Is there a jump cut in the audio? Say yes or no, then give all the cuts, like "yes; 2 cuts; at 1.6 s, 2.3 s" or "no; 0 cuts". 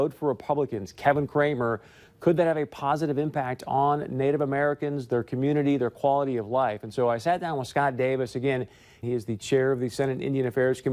yes; 1 cut; at 9.0 s